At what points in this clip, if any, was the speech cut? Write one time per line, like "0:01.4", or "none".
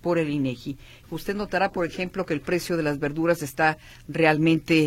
0:01.0